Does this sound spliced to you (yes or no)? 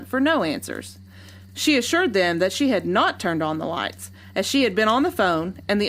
yes